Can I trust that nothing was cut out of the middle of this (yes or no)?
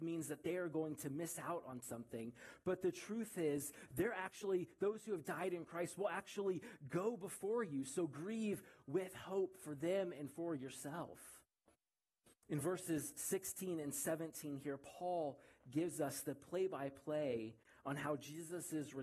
yes